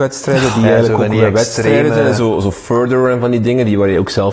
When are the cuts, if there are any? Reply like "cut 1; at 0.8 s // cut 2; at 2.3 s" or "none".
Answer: none